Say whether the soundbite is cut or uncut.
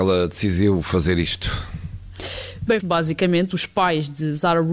cut